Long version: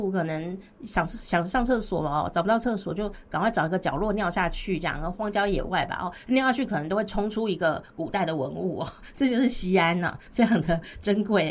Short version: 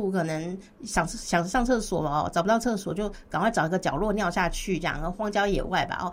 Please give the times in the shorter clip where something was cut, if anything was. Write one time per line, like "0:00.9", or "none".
none